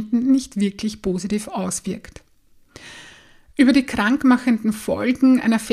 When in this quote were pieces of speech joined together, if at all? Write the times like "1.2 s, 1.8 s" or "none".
none